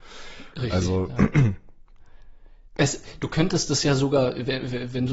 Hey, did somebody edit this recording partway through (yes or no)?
no